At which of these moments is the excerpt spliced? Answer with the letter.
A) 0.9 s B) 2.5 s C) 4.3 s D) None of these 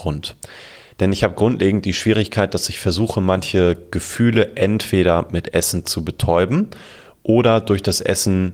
A